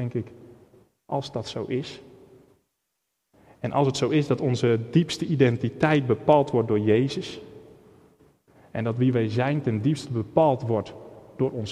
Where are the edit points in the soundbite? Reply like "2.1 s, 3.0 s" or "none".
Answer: none